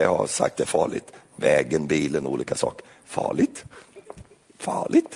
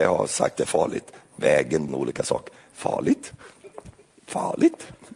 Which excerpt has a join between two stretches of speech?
second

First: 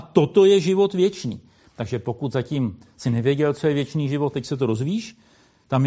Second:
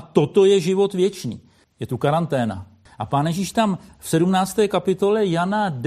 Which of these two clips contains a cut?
second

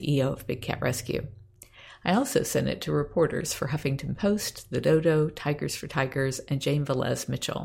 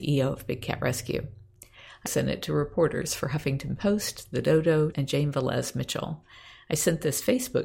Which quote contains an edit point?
second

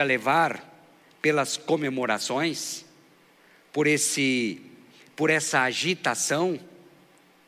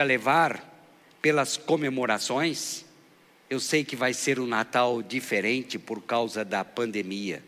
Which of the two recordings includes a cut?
second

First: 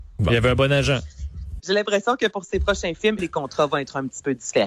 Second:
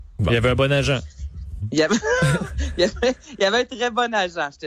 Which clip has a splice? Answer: first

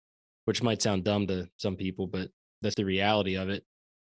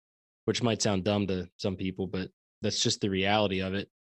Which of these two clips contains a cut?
first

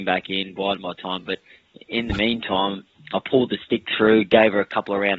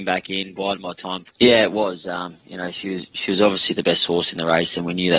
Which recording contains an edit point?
second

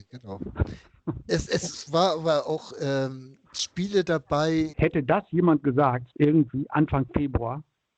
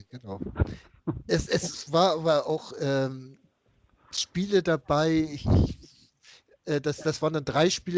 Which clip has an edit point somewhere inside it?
first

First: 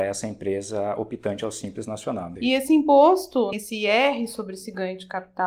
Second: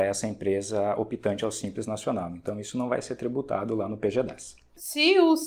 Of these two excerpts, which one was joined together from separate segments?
first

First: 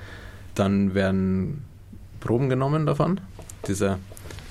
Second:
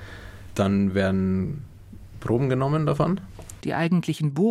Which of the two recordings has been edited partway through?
second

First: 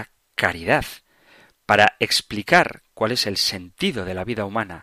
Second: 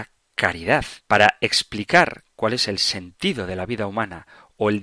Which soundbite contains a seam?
second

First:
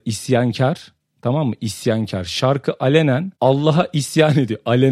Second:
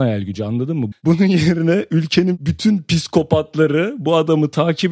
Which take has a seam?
second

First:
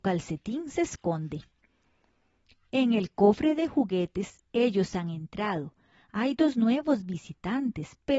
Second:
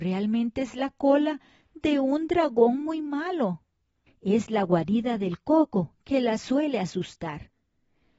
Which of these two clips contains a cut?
second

